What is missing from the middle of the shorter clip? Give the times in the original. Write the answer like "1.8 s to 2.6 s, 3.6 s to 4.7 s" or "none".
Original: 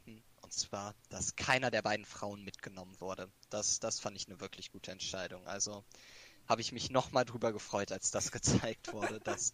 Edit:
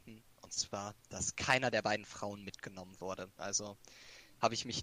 3.4 s to 5.4 s